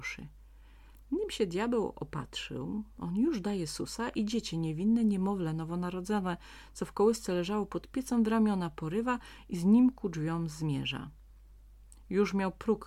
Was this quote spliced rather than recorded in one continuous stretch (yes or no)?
no